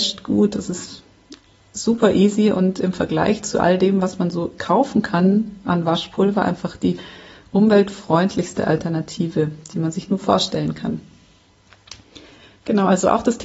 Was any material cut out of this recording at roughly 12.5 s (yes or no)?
no